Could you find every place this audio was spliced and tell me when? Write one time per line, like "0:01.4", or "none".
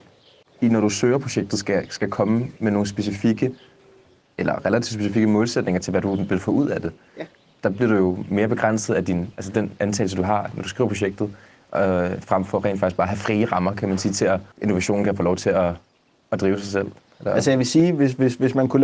0:14.5